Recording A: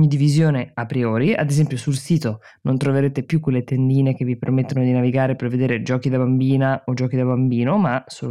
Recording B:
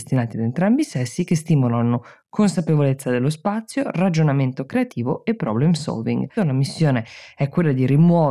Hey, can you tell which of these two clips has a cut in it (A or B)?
B